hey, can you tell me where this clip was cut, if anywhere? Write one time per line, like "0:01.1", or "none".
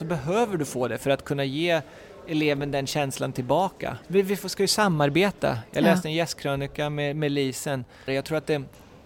0:04.0
0:08.1